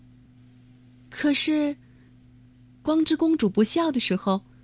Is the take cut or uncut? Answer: uncut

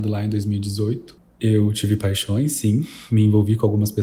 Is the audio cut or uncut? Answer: uncut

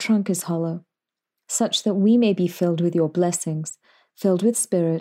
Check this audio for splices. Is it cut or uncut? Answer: uncut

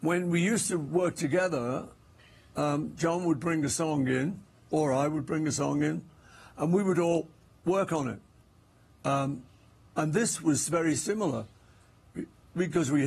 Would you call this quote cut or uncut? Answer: uncut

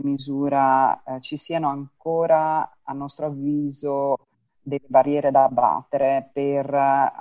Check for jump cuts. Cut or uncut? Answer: uncut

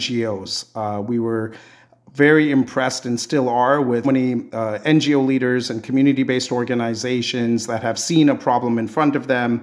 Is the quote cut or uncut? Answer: cut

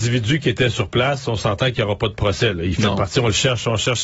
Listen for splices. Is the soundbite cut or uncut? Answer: uncut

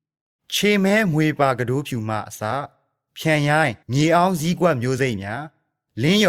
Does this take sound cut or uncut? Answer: cut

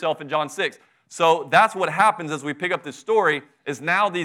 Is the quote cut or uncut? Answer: uncut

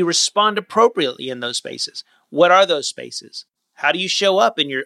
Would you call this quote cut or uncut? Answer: cut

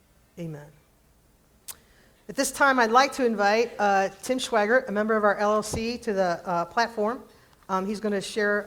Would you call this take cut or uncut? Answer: uncut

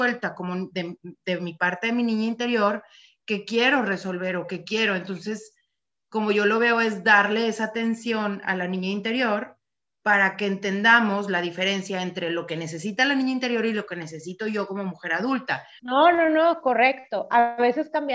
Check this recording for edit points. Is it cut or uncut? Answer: cut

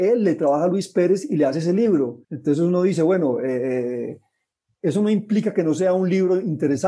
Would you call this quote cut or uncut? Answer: cut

